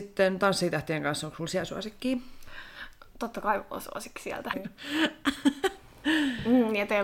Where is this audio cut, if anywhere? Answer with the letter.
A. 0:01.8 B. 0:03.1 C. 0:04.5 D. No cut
C